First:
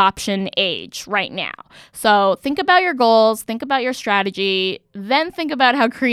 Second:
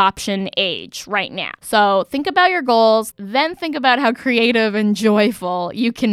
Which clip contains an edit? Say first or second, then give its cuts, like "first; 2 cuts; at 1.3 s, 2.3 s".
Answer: second; 2 cuts; at 1.6 s, 3.1 s